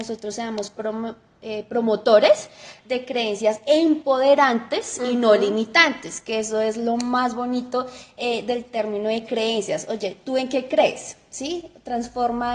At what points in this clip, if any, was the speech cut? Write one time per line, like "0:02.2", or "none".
none

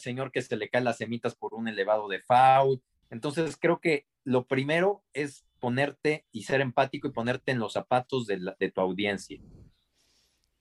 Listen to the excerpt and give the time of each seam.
0:03.0

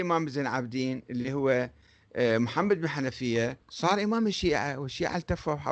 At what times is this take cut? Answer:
0:03.6

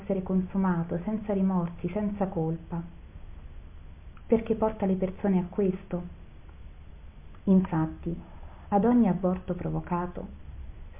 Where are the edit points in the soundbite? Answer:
0:04.2
0:07.4

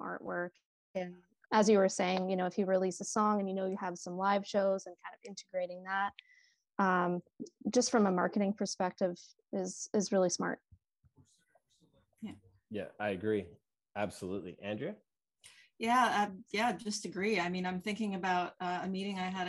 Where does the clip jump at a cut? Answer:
0:01.5

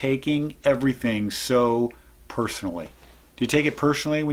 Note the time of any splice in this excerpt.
none

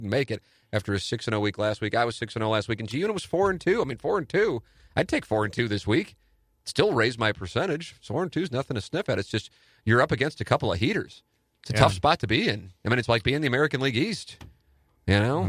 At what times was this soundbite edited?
none

